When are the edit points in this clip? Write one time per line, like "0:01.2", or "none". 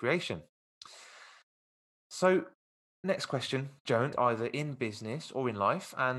0:04.1